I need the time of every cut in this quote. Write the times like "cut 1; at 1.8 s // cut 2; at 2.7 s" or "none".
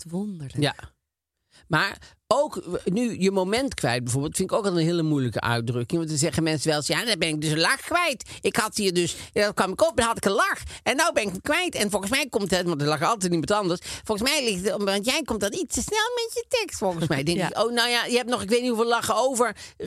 none